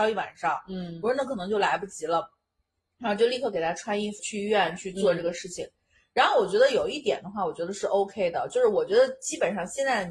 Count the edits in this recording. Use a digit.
1